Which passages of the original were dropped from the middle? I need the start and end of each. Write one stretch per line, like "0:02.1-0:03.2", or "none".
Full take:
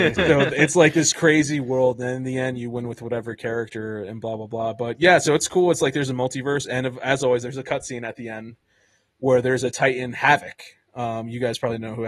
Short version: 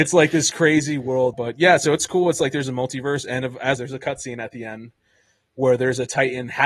0:02.0-0:04.7
0:07.2-0:07.4